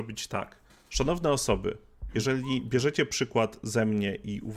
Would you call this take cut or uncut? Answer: uncut